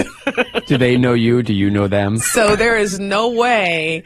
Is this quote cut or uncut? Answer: cut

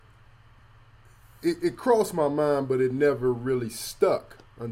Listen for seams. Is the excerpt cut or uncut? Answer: uncut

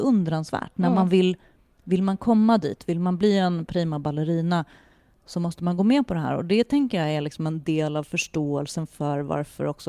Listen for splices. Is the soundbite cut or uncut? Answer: uncut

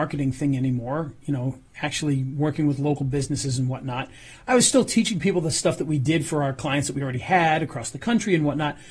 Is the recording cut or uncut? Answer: uncut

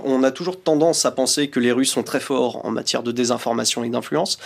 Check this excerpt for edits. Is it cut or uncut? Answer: cut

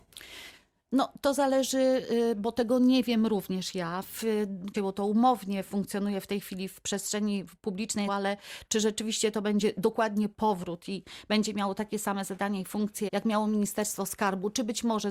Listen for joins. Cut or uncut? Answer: cut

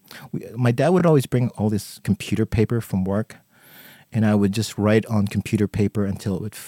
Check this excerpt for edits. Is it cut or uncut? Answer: uncut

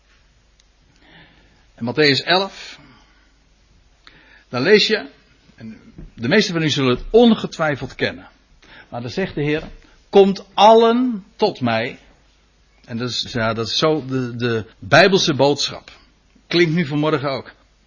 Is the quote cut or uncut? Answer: cut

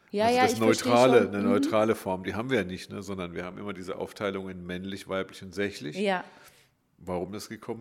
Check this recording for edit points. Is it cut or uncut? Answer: uncut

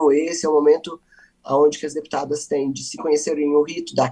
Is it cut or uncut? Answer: cut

